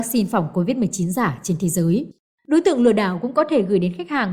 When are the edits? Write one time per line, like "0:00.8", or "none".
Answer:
0:02.4